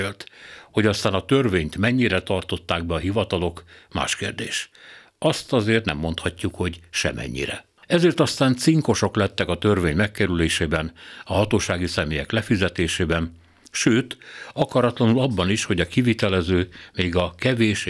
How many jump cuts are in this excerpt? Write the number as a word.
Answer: one